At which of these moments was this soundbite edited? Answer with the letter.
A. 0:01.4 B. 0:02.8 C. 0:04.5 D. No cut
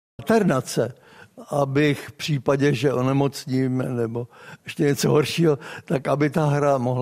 D